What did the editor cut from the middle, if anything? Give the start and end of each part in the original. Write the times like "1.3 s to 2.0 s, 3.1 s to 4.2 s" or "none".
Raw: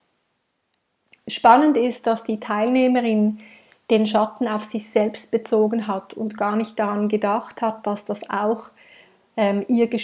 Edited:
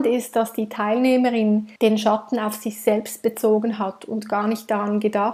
3.5 s to 3.8 s

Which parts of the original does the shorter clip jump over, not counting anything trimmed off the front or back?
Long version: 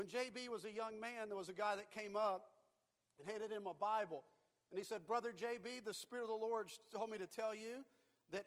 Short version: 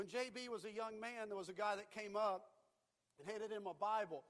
none

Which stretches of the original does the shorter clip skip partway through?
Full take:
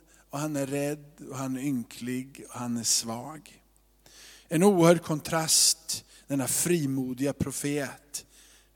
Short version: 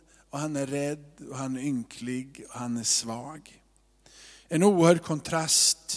none

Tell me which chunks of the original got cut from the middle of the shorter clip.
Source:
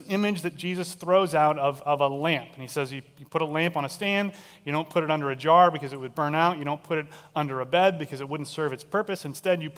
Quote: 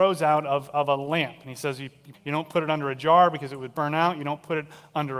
3.3 s to 4.5 s

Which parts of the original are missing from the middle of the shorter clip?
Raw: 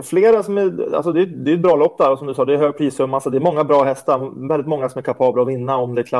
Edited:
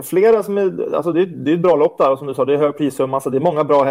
none

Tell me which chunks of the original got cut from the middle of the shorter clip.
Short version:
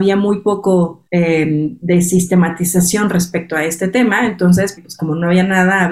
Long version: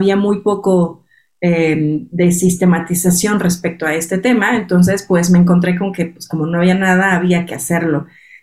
1.1 s to 1.4 s, 5.1 s to 6.1 s

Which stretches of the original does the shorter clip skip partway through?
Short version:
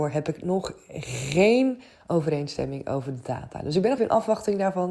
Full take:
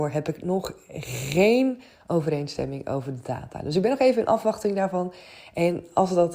4.0 s to 4.1 s

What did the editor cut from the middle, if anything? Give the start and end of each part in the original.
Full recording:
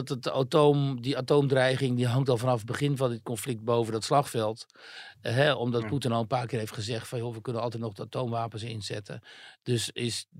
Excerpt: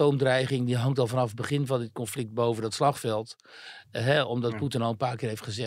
none

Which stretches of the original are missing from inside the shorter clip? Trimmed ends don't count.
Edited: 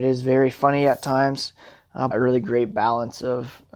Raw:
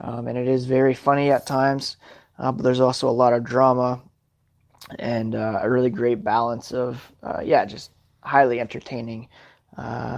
2.5 s to 5.6 s

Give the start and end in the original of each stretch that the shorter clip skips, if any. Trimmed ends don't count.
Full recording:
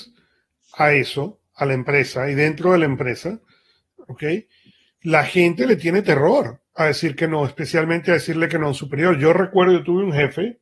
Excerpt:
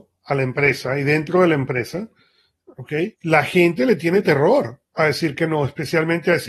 4.4 s to 4.9 s

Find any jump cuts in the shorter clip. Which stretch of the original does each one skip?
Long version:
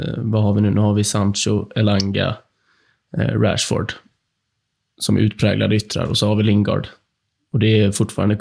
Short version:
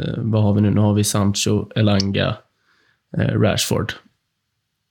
none

